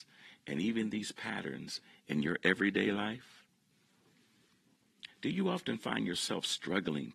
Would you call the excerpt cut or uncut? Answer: cut